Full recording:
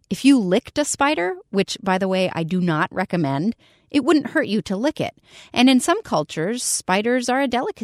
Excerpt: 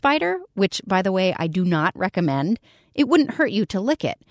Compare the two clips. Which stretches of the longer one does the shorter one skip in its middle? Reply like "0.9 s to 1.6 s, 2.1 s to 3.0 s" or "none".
none

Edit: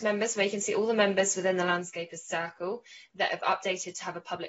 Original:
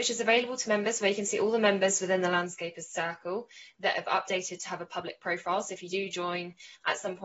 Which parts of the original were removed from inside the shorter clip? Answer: none

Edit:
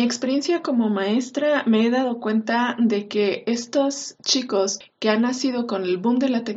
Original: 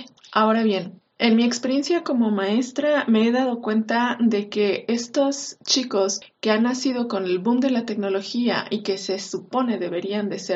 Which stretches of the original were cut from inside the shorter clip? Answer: none

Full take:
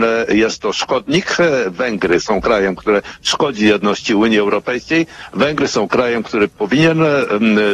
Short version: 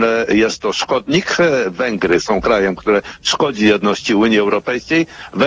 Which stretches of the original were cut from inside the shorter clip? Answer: none

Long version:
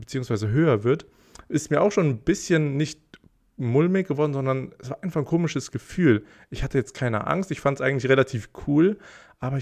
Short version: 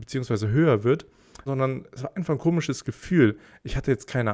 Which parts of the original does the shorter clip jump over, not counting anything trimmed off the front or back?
1.5 s to 4.3 s

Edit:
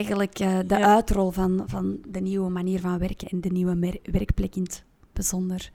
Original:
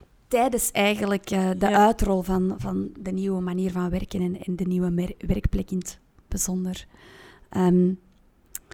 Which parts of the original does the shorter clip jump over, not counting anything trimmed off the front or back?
4.1 s to 4.4 s

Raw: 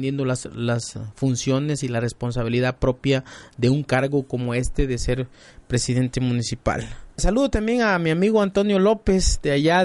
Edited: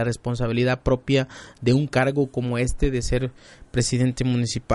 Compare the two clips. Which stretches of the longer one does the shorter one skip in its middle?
none

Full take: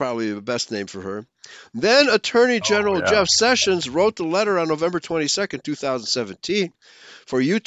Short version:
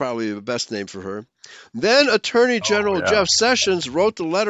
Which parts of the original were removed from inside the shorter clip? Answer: none

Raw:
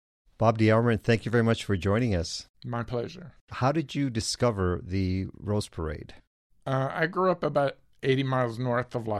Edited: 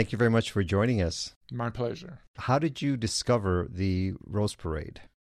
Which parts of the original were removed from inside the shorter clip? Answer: none

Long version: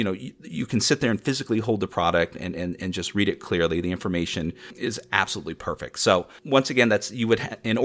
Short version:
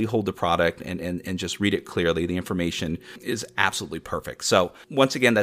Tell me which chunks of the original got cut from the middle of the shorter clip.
none

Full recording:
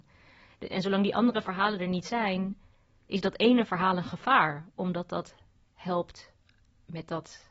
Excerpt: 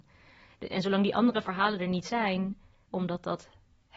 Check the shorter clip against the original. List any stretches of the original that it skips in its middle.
2.9 s to 4.7 s

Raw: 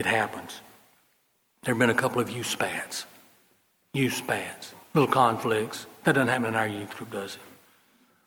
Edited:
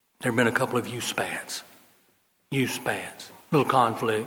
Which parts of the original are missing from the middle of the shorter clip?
none

